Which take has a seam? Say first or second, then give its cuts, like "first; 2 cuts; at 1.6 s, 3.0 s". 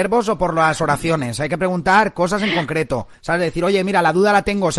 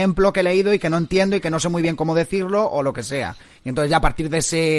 first; 1 cut; at 3.1 s